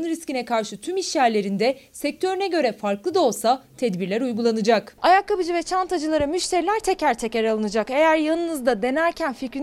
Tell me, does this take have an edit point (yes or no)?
no